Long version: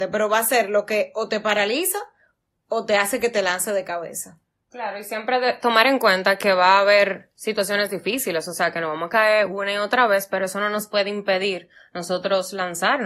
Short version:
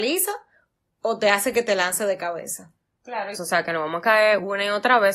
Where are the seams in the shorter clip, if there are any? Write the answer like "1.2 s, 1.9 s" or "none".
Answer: 3.3 s

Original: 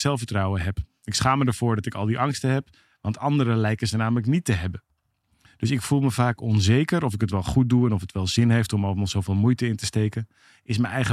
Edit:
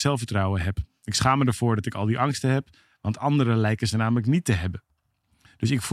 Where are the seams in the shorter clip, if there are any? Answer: none

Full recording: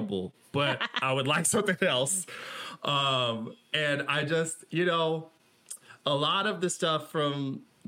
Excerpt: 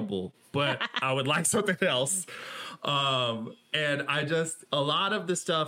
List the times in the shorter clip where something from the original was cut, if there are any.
4.7 s

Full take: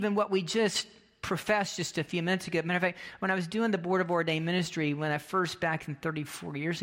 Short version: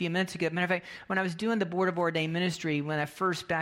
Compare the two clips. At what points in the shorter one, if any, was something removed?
none

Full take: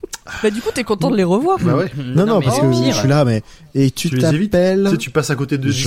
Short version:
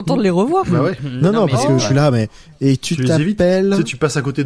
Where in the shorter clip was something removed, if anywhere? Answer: 1.8 s

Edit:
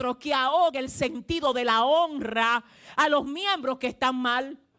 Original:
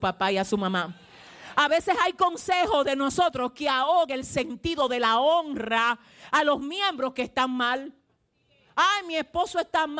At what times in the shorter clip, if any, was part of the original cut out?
none

